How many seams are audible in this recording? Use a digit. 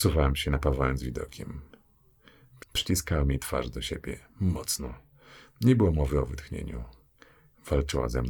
1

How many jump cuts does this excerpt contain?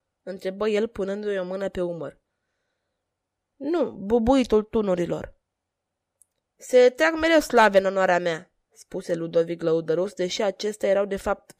0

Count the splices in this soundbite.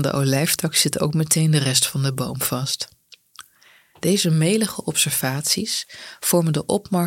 0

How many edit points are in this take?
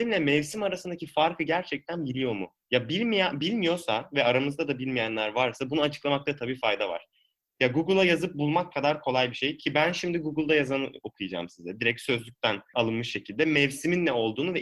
1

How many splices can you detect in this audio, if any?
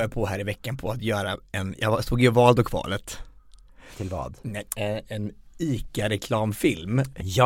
1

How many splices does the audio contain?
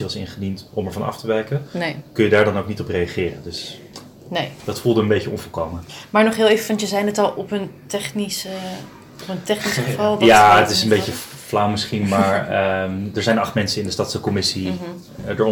0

